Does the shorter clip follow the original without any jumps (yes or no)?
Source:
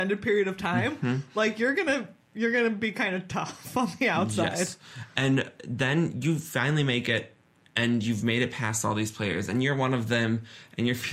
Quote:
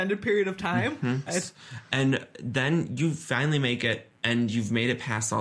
no